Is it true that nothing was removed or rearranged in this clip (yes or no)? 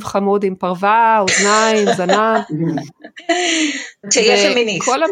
no